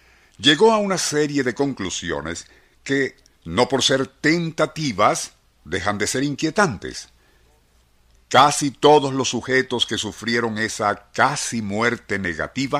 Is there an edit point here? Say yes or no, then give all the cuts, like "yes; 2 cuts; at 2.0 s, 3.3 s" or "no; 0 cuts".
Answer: no; 0 cuts